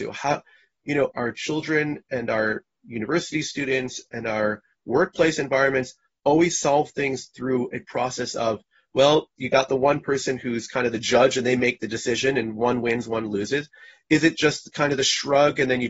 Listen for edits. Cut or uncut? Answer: cut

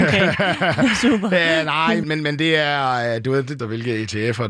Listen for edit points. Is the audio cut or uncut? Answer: cut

